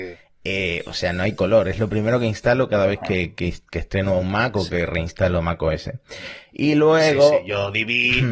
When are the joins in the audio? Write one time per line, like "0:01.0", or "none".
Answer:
none